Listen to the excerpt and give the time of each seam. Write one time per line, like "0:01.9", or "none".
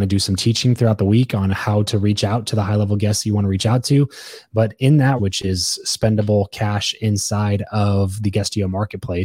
0:05.2